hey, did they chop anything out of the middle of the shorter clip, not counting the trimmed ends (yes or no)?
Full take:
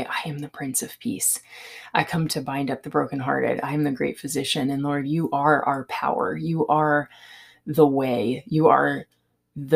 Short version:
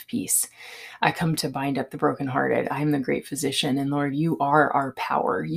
no